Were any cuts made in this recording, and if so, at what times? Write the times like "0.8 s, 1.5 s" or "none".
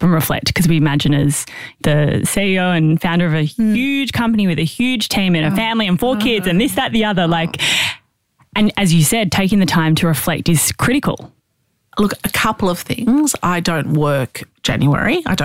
none

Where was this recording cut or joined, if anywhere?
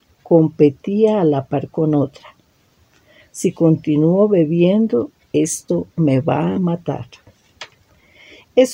none

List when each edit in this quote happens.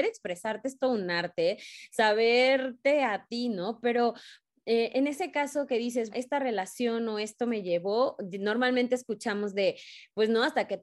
6.1 s

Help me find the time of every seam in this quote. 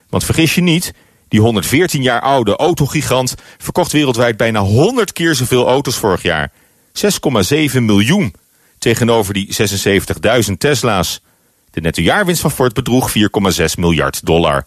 none

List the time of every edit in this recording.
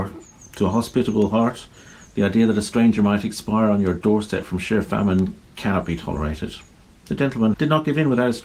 7.5 s

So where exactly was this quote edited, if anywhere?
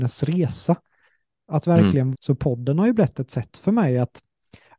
2.1 s

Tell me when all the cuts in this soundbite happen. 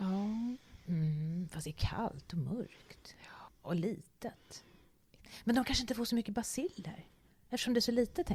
none

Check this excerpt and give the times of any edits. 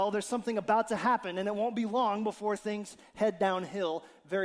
none

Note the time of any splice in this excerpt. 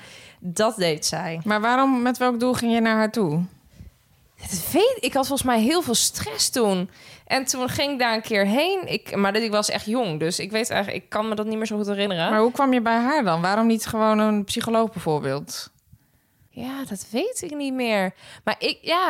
none

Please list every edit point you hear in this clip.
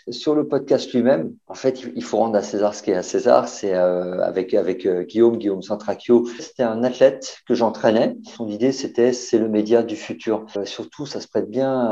none

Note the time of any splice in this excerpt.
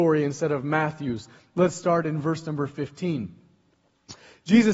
none

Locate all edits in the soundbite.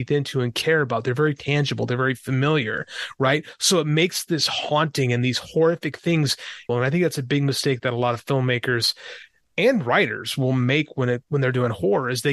6.7 s

